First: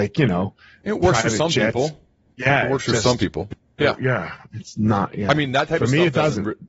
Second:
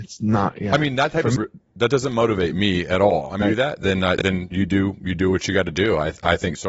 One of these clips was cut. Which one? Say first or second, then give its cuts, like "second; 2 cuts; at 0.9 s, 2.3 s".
second; 3 cuts; at 1.4 s, 3.4 s, 4.5 s